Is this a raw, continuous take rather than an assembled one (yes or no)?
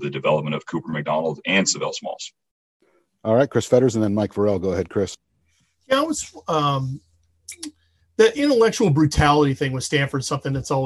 yes